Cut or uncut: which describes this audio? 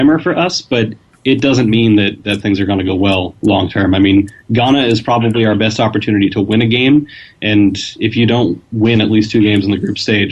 uncut